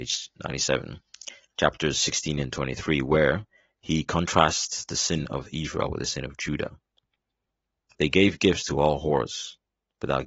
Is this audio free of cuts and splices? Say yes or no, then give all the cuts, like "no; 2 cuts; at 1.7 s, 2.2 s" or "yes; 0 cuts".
no; 1 cut; at 7.9 s